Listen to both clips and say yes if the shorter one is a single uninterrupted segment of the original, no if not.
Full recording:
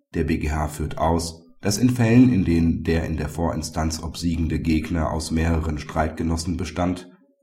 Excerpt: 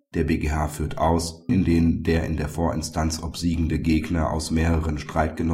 no